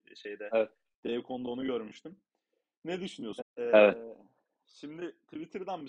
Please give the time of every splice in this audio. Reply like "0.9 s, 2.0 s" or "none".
3.4 s